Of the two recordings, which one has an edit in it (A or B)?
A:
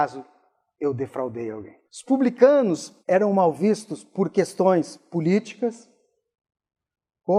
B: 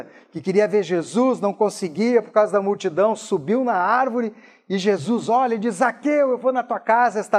A